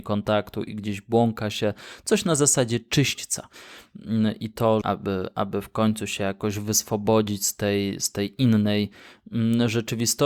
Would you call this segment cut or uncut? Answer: cut